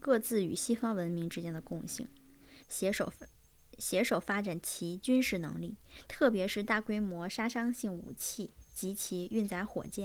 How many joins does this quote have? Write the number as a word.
one